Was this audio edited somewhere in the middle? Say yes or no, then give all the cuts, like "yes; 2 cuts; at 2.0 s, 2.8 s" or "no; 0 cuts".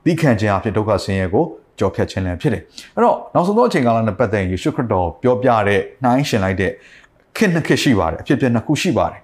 no; 0 cuts